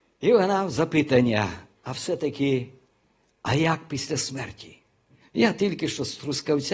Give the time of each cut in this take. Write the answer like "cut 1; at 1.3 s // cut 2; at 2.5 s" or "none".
cut 1; at 5.2 s